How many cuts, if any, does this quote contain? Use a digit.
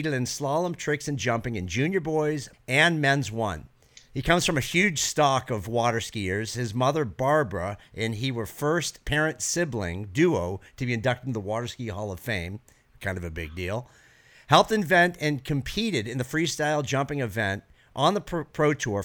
2